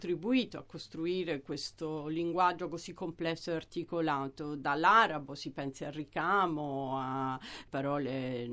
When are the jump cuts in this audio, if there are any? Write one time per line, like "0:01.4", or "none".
none